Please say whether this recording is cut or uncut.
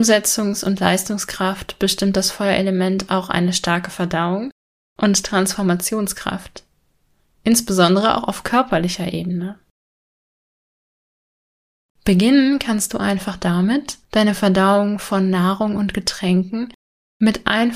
cut